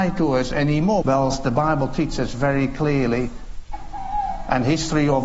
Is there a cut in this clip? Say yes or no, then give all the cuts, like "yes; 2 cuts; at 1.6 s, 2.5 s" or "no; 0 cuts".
yes; 1 cut; at 1.0 s